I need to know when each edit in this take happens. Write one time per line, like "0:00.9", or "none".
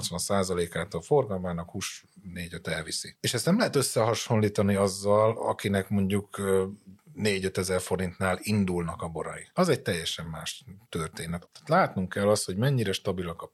0:11.5